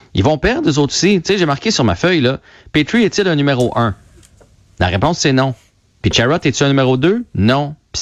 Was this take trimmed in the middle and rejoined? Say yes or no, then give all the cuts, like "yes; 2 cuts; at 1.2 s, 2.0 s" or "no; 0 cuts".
no; 0 cuts